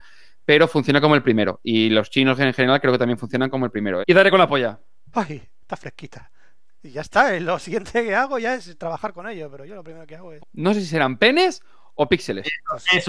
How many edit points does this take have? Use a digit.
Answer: 2